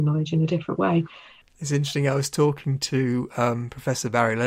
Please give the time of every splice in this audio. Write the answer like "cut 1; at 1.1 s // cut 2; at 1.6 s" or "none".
cut 1; at 1.4 s